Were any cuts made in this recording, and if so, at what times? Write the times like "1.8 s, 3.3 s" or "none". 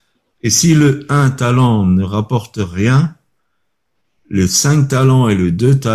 none